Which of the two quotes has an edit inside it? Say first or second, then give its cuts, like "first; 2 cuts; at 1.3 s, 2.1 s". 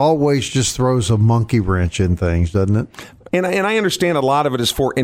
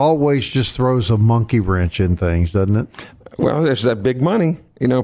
first; 1 cut; at 3.3 s